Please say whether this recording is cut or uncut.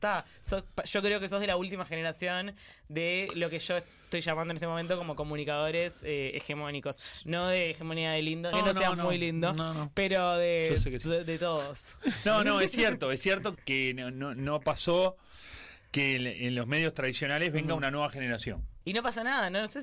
cut